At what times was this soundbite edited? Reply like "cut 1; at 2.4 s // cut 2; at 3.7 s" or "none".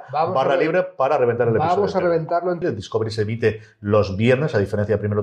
cut 1; at 2.6 s